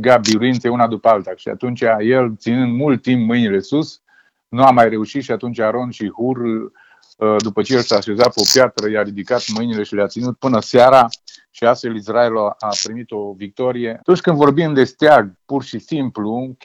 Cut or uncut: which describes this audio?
cut